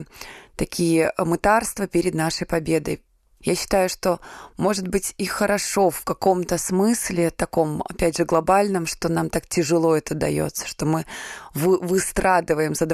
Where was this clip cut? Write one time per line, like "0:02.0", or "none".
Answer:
none